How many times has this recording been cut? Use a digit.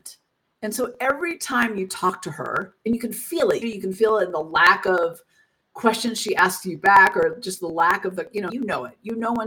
2